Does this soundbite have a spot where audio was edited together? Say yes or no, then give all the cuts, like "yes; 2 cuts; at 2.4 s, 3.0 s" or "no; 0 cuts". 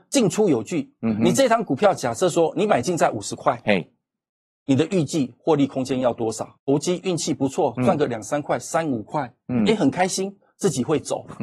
yes; 1 cut; at 6.6 s